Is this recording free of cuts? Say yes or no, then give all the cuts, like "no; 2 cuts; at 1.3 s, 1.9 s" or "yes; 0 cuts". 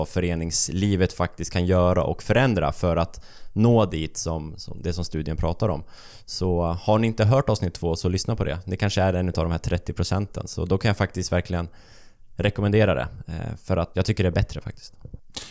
no; 1 cut; at 13.9 s